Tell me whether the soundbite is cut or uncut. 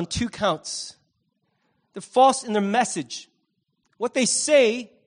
uncut